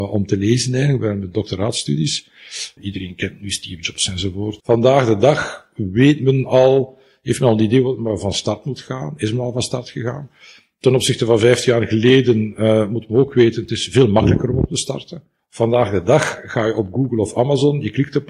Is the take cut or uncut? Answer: cut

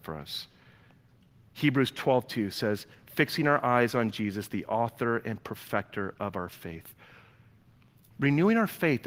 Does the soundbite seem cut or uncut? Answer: uncut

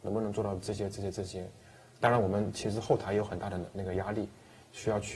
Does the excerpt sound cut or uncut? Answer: uncut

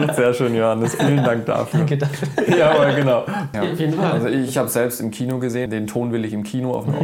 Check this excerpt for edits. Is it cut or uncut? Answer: cut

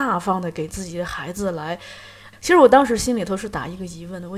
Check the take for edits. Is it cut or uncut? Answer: cut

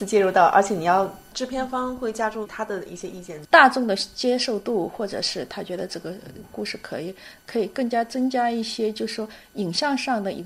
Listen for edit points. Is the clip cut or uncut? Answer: cut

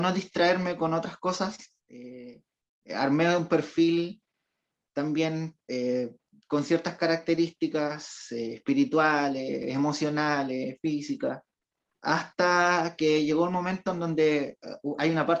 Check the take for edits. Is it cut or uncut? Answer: uncut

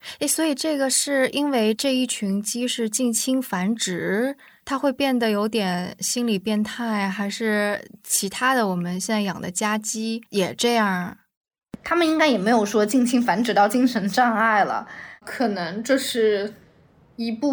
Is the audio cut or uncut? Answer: cut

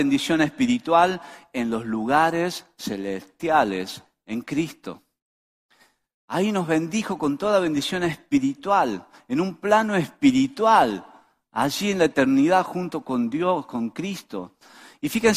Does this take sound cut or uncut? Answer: uncut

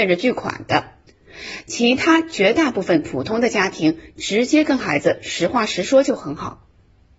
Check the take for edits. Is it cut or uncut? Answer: uncut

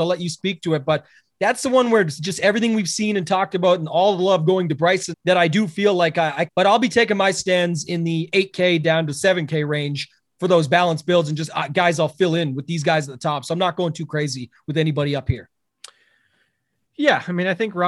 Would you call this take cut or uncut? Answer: cut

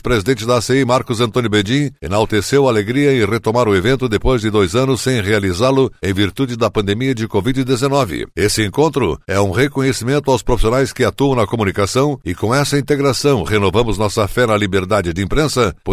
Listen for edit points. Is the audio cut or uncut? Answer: uncut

